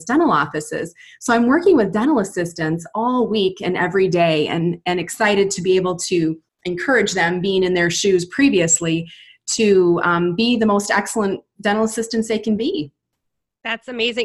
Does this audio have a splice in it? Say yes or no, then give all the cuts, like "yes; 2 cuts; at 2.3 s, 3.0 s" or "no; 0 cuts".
no; 0 cuts